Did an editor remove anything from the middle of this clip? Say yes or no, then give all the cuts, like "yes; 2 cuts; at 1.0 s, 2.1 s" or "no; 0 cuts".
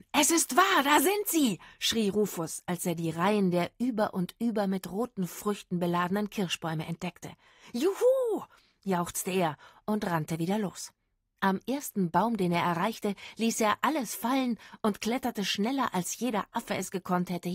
no; 0 cuts